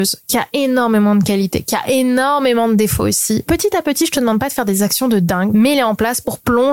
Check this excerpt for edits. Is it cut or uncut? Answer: cut